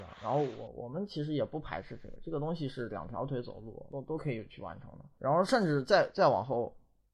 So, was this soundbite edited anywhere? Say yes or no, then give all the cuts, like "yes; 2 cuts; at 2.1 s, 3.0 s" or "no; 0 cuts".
no; 0 cuts